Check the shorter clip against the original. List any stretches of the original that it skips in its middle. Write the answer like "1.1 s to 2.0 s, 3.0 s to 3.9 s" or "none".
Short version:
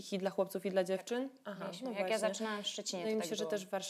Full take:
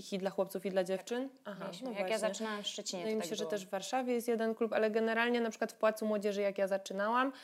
none